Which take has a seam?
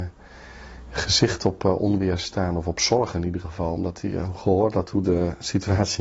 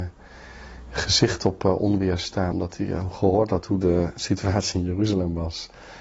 second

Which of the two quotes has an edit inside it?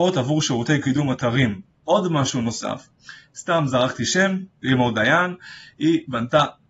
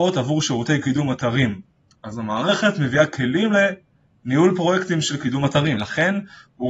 first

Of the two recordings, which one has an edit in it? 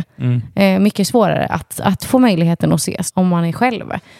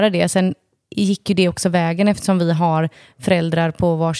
first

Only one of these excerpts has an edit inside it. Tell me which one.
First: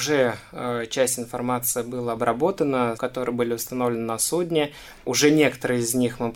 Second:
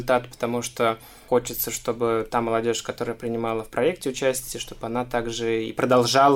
first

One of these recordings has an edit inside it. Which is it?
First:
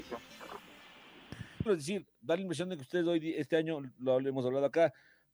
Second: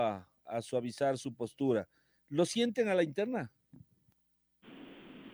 first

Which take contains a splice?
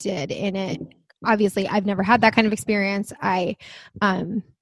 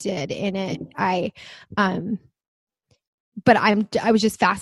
second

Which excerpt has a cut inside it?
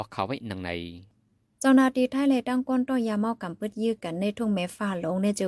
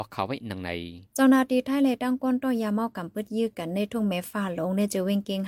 second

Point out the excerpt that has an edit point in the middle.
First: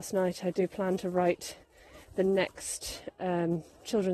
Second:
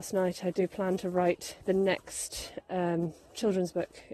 second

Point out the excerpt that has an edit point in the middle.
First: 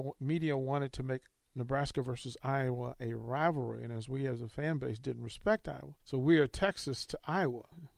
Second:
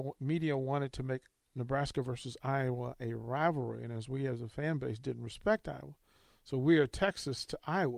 first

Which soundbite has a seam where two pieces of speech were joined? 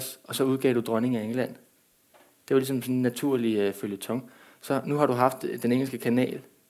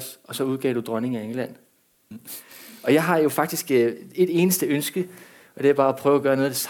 second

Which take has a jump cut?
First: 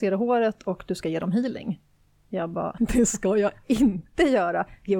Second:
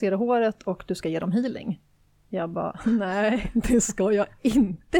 first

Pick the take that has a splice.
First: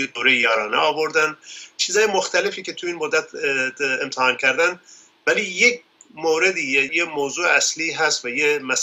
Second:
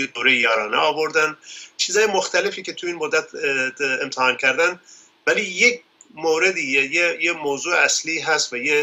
first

